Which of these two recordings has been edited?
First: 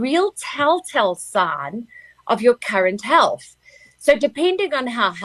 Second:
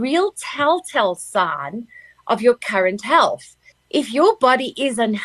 second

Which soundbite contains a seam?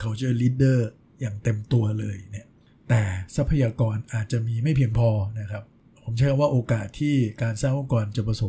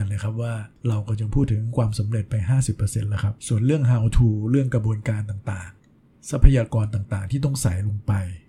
second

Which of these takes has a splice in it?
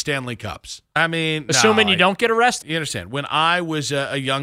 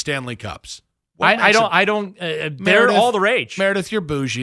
first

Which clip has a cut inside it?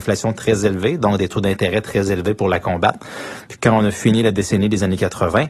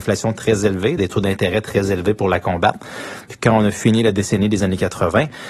second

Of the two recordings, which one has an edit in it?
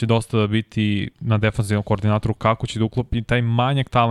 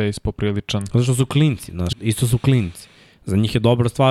second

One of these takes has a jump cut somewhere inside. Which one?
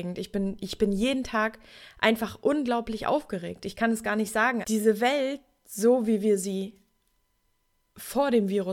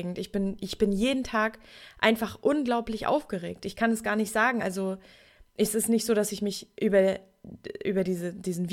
first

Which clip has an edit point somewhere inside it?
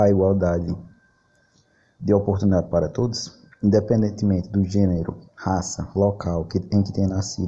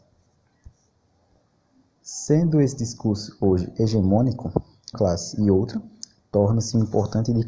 second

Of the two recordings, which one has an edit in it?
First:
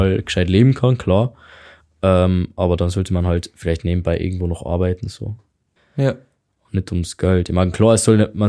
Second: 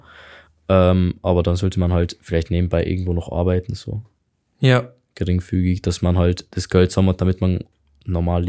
first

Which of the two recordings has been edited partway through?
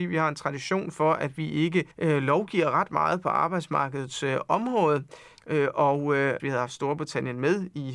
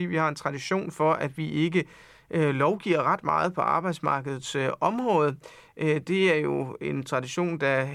first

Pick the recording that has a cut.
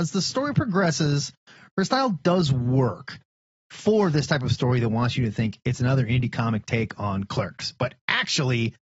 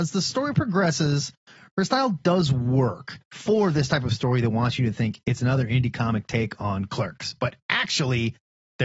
second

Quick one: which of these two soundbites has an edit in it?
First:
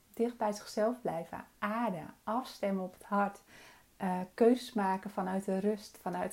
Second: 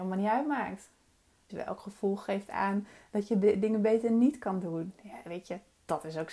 second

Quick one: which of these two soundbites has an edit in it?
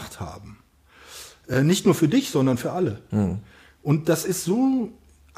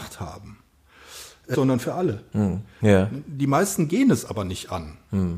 second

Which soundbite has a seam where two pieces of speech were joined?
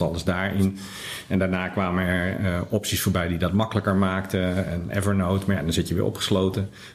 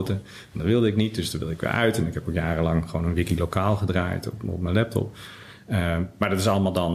first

